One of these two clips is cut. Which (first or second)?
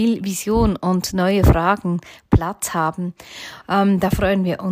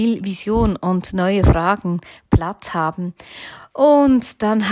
first